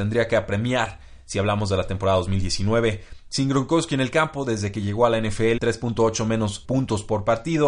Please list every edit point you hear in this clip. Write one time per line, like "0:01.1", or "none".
0:05.6
0:06.6

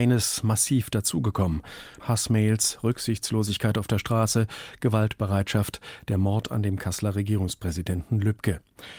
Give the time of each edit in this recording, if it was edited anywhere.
0:02.0

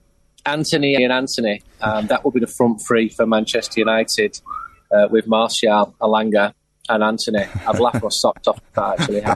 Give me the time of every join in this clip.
0:01.0

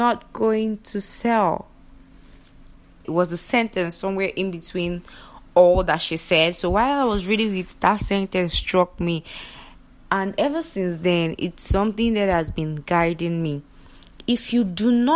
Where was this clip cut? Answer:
0:03.0

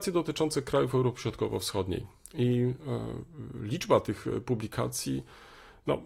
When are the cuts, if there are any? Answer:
none

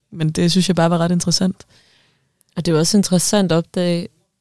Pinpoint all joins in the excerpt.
none

